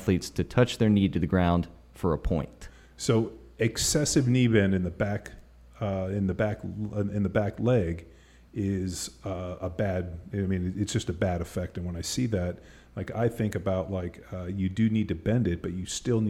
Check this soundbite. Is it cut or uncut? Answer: uncut